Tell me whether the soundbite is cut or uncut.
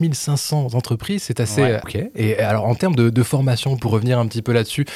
cut